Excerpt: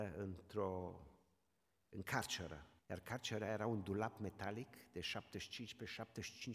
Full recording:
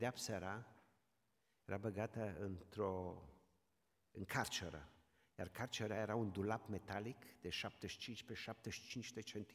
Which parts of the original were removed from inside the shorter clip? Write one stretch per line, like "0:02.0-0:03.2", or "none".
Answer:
0:05.0-0:05.3